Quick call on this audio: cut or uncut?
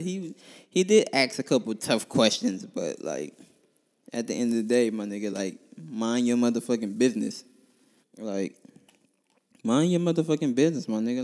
cut